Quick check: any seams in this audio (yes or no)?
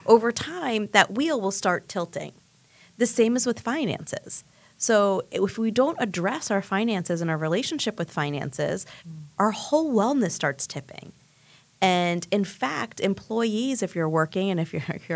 yes